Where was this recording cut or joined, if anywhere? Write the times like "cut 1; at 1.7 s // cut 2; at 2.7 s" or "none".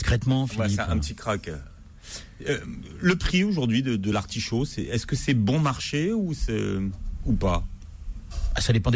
none